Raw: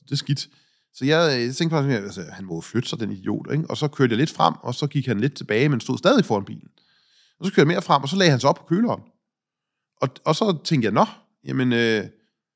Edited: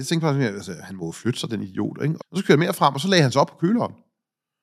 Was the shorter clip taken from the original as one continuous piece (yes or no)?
no